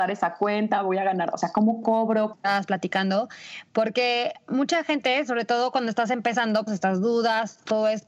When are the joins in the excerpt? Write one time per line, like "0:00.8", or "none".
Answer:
0:02.3
0:06.7